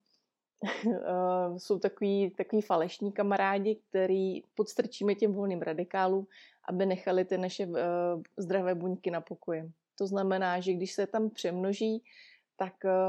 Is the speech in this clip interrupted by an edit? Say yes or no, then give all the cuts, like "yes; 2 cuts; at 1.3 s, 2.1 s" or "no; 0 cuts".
yes; 1 cut; at 9.9 s